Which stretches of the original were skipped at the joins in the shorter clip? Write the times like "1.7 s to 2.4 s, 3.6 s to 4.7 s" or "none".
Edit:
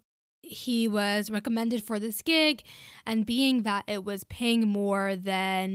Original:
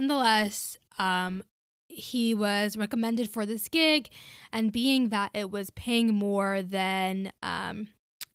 none